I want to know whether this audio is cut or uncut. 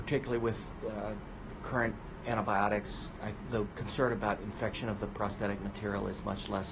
uncut